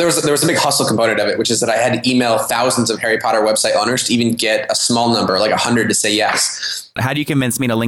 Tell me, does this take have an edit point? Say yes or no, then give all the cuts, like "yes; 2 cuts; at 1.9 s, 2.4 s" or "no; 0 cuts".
yes; 1 cut; at 7.0 s